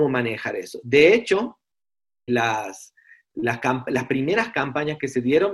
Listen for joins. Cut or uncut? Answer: cut